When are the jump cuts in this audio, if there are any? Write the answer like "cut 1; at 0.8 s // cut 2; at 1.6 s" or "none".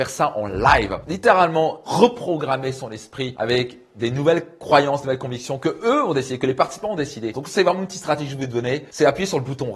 cut 1; at 7.3 s